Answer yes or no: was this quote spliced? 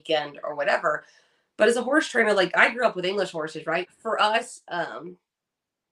yes